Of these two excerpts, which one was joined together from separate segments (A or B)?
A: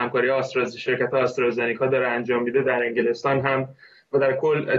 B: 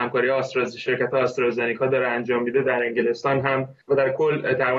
B